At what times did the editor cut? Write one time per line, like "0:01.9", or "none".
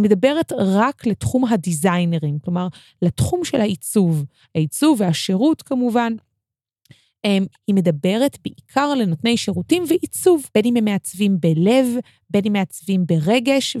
0:07.5
0:10.5